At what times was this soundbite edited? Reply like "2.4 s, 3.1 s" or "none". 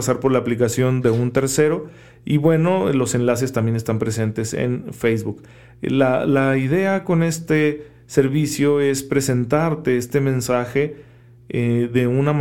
none

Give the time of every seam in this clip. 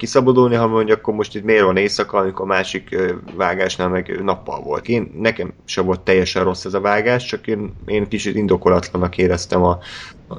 4.8 s

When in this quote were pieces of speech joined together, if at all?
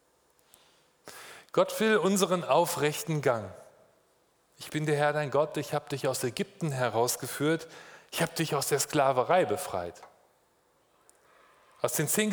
none

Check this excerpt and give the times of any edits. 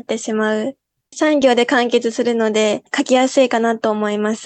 1.0 s

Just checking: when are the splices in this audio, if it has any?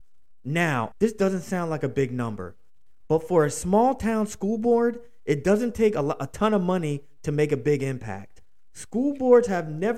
0.9 s

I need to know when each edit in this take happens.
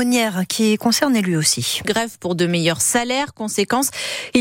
1.8 s

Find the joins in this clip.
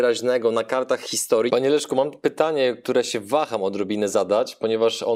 1.5 s

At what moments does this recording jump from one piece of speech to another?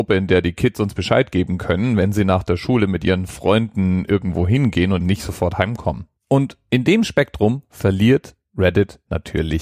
5.0 s, 6.2 s

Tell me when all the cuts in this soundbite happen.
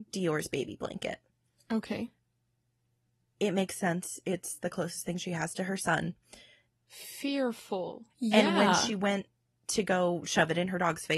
6.7 s, 8.1 s

